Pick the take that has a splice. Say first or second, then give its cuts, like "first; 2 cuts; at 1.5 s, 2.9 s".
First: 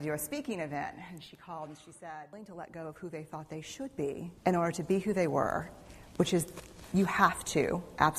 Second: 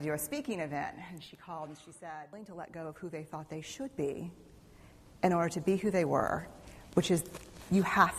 first; 1 cut; at 4.4 s